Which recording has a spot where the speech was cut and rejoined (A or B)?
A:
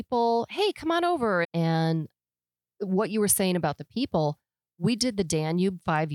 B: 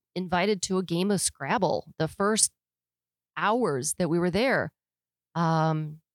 A